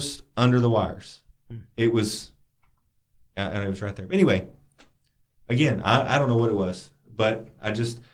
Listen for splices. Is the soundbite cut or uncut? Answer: uncut